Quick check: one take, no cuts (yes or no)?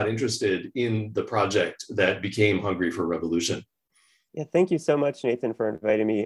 yes